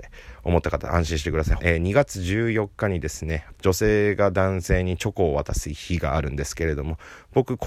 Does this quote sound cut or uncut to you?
cut